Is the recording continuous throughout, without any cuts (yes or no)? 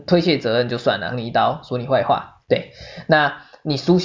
no